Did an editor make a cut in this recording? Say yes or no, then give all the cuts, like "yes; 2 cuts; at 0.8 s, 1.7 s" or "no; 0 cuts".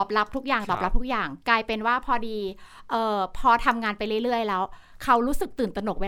no; 0 cuts